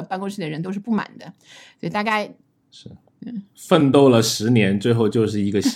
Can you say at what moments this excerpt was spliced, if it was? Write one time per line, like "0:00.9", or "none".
0:02.6

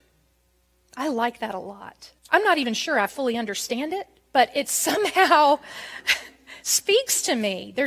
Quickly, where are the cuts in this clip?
0:02.2

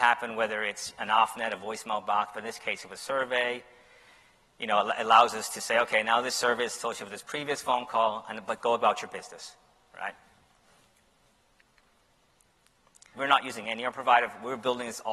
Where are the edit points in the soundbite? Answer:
0:13.1

